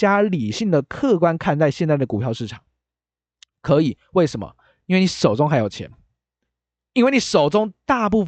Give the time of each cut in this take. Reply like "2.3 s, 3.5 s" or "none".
none

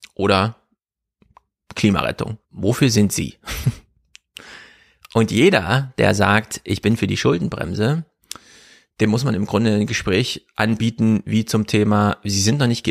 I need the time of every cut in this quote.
2.4 s

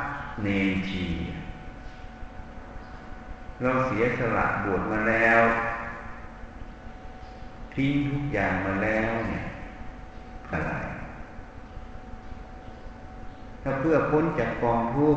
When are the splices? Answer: 10.5 s

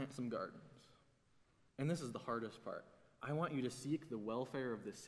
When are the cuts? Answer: 1.7 s

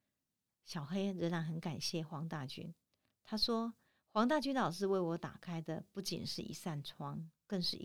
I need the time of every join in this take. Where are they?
none

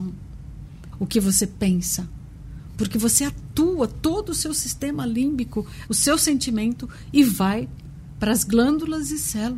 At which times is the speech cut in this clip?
0.9 s, 2.7 s, 5.9 s

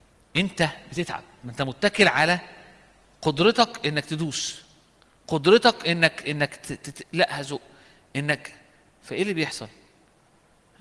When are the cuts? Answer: none

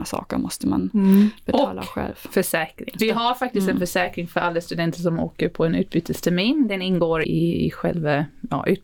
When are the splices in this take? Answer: 3.0 s, 7.2 s

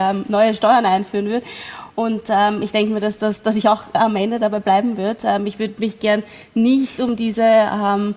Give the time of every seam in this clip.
none

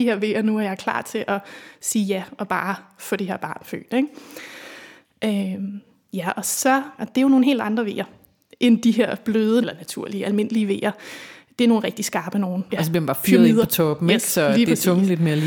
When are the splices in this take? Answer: 7.0 s, 9.6 s, 12.7 s

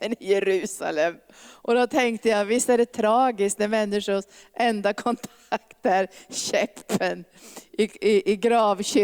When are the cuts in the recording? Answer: none

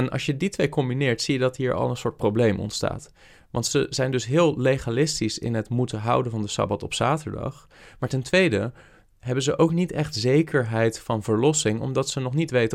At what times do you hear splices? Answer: none

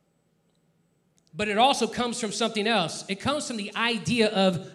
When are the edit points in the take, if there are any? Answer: 1.3 s

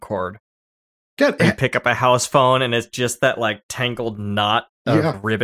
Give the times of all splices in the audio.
1.4 s

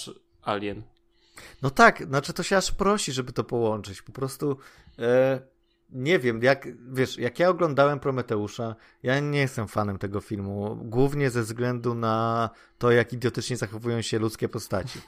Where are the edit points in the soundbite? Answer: none

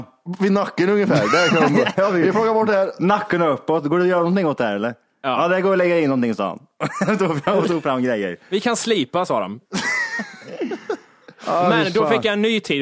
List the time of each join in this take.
1.9 s

